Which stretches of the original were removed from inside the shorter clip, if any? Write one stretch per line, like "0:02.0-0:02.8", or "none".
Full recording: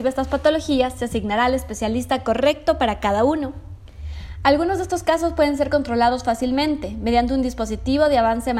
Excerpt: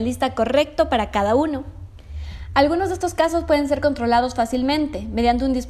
none